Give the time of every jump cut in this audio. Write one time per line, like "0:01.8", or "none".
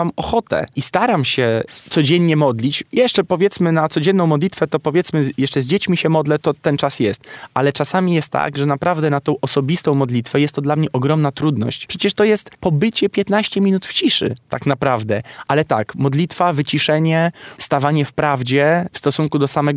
0:06.4
0:15.5
0:17.6